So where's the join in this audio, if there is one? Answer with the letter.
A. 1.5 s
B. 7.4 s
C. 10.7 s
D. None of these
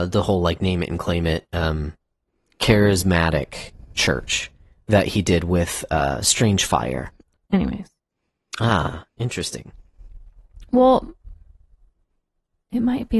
B